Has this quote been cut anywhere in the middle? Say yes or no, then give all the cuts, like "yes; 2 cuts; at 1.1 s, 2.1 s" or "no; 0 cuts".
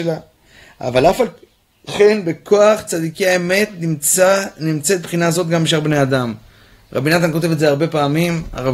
no; 0 cuts